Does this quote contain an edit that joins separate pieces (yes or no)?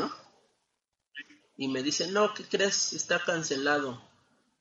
yes